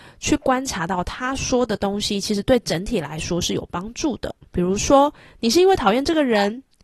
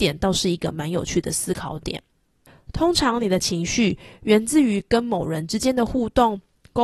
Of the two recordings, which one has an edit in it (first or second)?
first